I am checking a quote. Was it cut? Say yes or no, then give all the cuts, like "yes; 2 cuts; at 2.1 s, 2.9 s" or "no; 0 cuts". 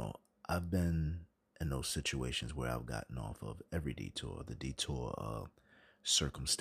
no; 0 cuts